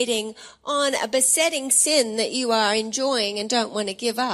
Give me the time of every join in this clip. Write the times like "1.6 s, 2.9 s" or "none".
none